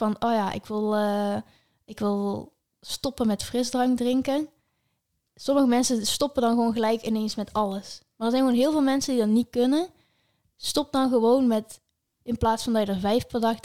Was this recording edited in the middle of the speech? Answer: no; 0 cuts

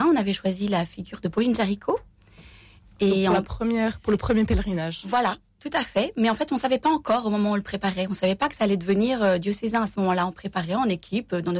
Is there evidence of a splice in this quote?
no; 0 cuts

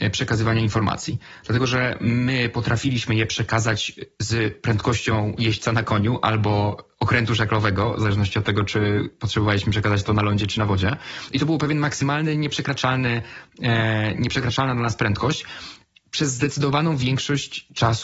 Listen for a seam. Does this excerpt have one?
no; 0 cuts

